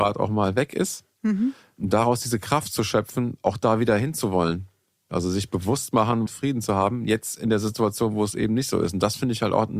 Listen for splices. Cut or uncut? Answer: cut